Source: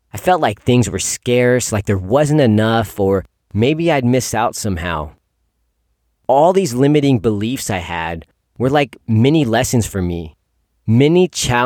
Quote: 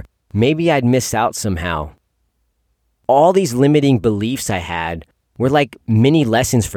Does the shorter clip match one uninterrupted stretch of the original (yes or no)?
yes